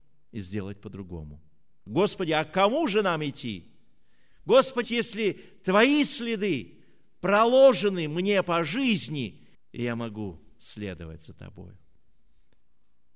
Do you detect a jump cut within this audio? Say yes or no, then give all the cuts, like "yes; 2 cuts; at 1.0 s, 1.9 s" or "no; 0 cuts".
yes; 3 cuts; at 1.9 s, 4.8 s, 9.5 s